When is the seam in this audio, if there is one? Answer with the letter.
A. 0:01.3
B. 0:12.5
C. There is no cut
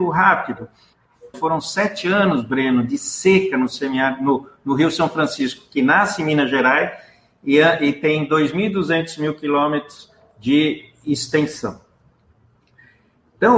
A